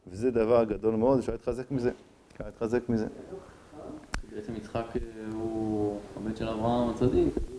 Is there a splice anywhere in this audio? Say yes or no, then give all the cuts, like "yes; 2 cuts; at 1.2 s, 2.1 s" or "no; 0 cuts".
no; 0 cuts